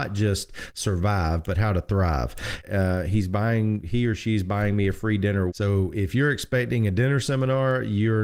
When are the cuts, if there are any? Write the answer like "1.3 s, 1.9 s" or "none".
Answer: 2.6 s, 5.5 s